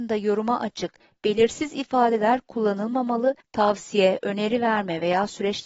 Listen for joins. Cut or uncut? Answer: cut